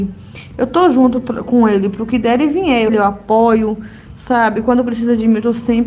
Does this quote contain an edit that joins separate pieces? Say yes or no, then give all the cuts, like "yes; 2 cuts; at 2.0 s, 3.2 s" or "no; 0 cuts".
yes; 1 cut; at 2.9 s